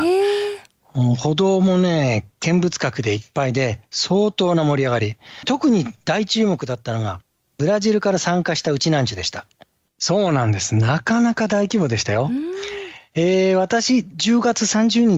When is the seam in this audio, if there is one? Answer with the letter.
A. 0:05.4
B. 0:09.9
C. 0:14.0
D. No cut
B